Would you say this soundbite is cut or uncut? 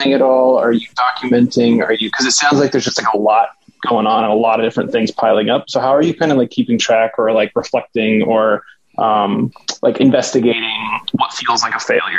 uncut